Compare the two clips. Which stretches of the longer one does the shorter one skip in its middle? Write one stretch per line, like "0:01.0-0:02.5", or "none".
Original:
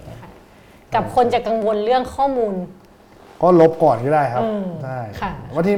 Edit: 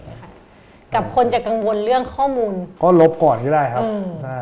0:02.8-0:03.4